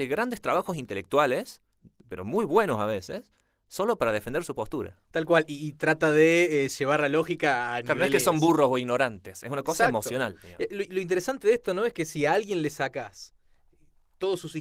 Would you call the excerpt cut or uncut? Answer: uncut